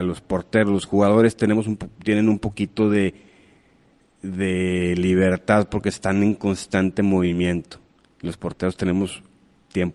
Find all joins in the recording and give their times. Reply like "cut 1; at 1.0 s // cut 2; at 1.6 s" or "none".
none